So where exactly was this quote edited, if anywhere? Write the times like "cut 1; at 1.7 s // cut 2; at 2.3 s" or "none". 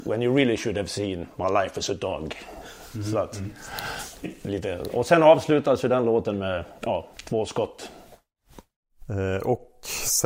cut 1; at 7.1 s